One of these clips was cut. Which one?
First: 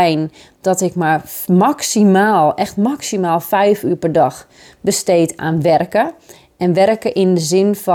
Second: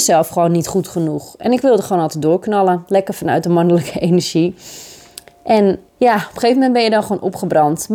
second; 1 cut; at 5.9 s

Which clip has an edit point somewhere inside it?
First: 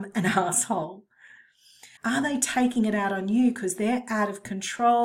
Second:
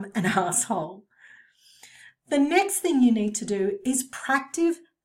first; 1 cut; at 2.0 s

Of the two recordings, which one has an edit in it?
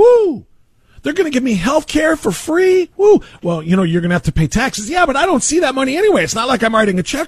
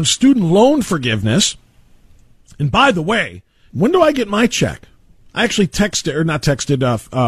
second; 1 cut; at 3.7 s

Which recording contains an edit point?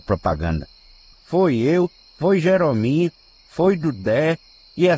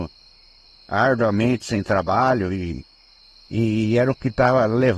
first; 1 cut; at 1.1 s

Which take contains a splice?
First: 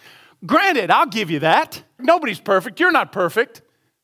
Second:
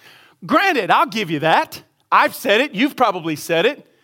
first; 1 cut; at 2.0 s

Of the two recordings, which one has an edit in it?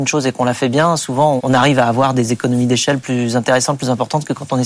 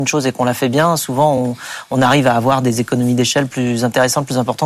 first; 1 cut; at 1.4 s

